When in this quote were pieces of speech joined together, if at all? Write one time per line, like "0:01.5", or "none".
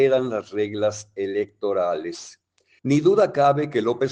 0:02.8